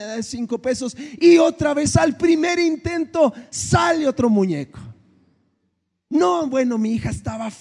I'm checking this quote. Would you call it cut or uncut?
uncut